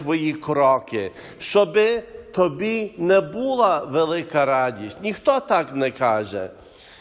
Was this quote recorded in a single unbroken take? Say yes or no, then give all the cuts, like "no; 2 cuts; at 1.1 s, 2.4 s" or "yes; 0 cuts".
yes; 0 cuts